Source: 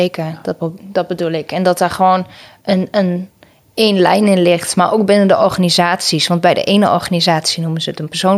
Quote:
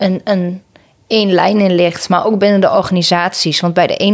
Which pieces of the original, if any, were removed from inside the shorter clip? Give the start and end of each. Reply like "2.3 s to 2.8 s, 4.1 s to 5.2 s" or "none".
none